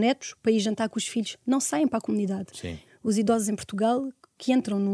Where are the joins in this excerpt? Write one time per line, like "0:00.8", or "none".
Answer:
0:02.9